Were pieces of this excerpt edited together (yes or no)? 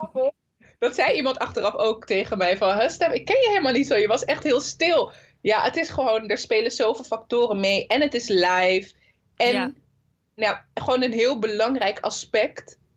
no